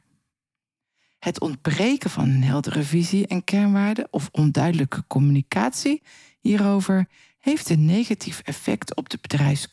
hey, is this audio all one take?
yes; 0 cuts

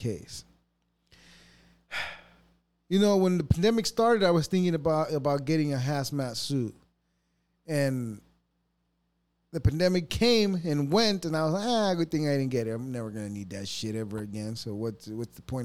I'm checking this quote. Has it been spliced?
no; 0 cuts

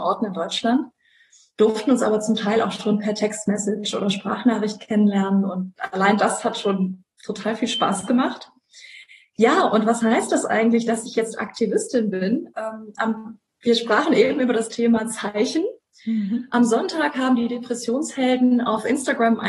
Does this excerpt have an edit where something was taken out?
no; 0 cuts

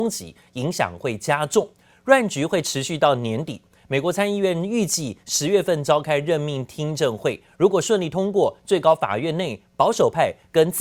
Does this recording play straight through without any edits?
yes; 0 cuts

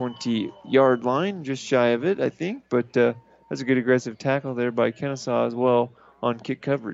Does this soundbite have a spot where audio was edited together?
no; 0 cuts

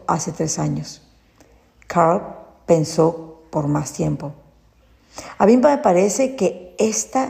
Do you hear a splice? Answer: no; 0 cuts

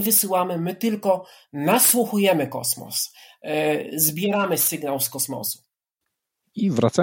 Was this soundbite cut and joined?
no; 0 cuts

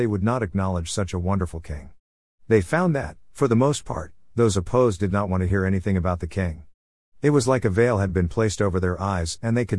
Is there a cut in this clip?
no; 0 cuts

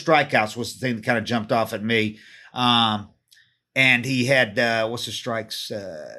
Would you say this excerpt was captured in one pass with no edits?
yes; 0 cuts

